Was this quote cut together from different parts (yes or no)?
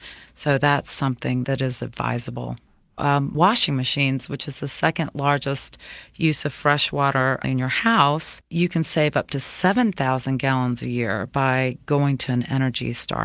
yes